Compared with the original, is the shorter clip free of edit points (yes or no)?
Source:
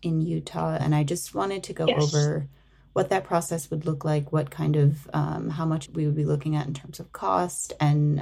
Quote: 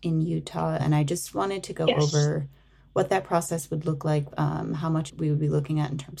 no